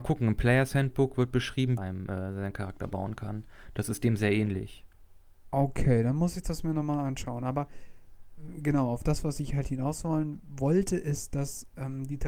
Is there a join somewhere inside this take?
yes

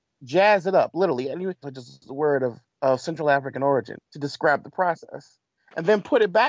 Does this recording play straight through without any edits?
no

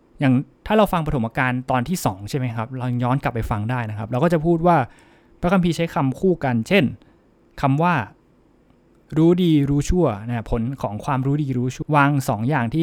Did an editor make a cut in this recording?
yes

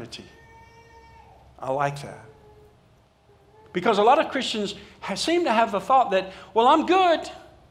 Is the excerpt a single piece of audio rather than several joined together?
yes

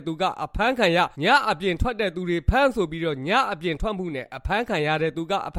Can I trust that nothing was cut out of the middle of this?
no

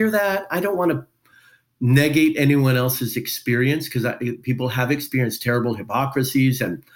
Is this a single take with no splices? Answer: yes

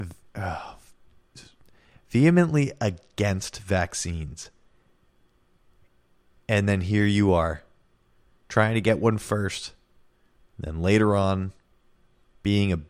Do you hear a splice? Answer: no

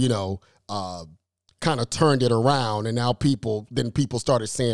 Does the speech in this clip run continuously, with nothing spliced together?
yes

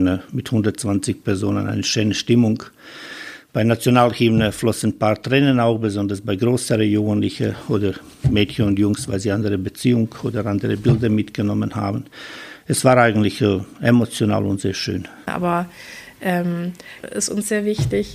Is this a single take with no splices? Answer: no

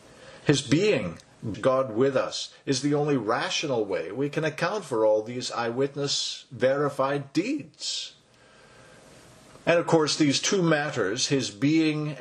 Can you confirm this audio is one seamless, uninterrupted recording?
no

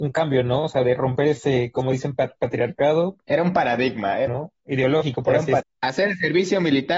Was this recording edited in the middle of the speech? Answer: yes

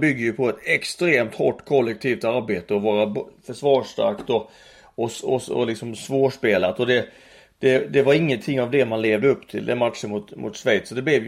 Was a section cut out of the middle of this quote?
no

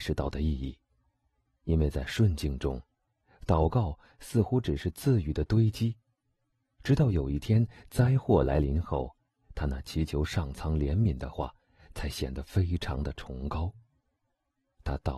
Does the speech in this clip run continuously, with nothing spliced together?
yes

